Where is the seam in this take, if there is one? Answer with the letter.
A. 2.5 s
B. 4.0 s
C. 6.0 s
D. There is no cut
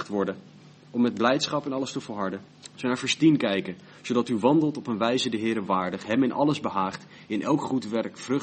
A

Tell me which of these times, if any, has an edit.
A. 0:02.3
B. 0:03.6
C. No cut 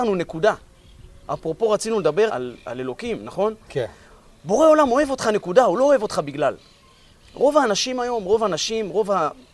A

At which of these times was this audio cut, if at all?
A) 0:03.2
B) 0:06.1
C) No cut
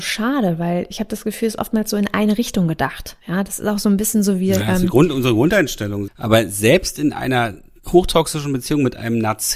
B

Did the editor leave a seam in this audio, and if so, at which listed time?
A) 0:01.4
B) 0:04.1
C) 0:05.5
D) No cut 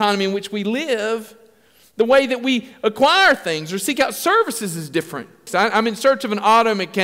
C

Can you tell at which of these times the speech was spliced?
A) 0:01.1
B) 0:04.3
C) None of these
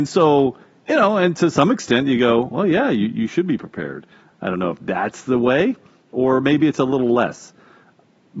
B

